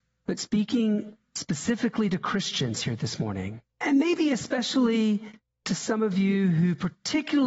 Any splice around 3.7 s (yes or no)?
yes